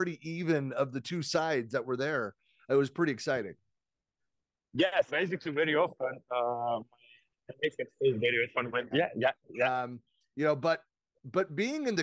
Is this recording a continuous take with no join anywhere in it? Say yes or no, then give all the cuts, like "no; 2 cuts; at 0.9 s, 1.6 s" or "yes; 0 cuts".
no; 2 cuts; at 5.1 s, 8.9 s